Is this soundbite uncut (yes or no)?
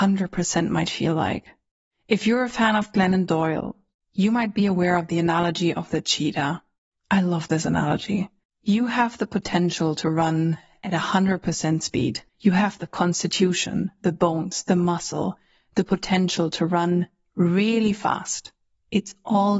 no